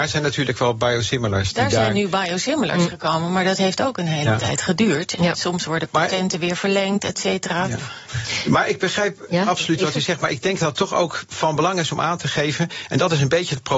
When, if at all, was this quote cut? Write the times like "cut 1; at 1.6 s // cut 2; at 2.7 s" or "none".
none